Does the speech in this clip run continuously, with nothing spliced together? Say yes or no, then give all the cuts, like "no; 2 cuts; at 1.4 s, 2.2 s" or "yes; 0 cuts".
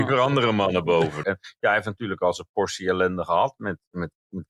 no; 1 cut; at 1.2 s